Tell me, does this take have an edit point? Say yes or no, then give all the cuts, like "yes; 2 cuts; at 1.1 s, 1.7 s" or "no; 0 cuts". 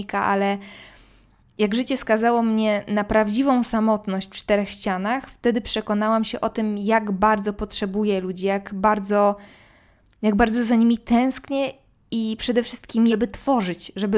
yes; 1 cut; at 13.1 s